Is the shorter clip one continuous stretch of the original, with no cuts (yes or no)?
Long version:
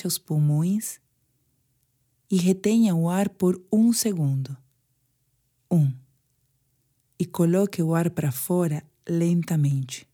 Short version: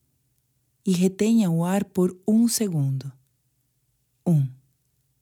yes